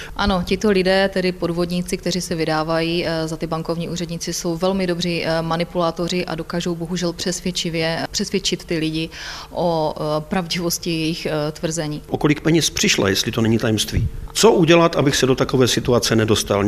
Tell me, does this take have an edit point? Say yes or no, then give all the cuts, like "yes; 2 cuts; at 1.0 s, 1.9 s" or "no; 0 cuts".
yes; 1 cut; at 14.3 s